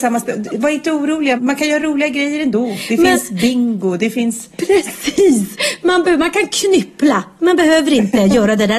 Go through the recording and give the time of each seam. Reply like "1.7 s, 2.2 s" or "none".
1.4 s

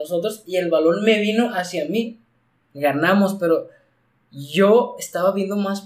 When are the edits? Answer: 2.7 s

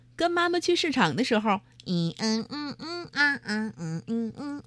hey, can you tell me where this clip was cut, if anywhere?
none

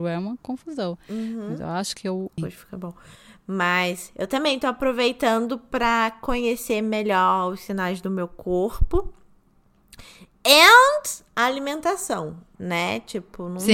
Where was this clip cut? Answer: 2.4 s, 12.6 s

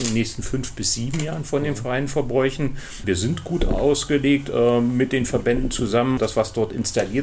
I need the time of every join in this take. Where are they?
3.0 s, 6.2 s

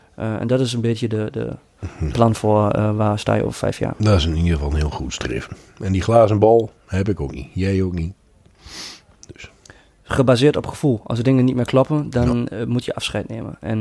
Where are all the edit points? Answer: none

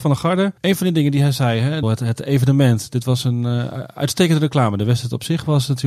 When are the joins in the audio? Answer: 1.8 s

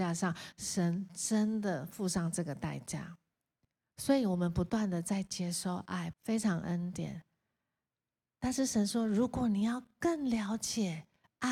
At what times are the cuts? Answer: 6.1 s

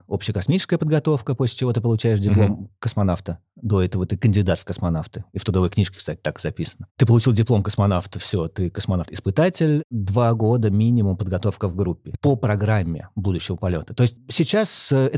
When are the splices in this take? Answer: 12.1 s, 14.2 s

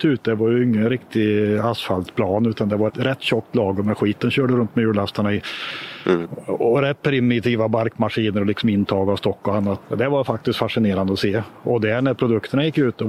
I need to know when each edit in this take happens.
2.9 s, 9.8 s

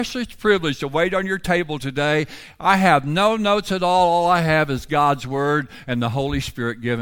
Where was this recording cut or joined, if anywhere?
none

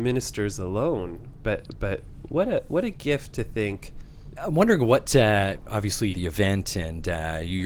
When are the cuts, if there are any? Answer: 4.4 s, 6.1 s

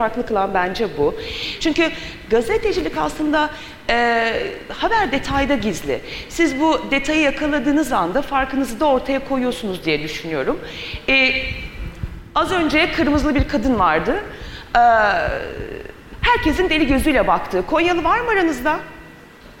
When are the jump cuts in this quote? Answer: 1.6 s

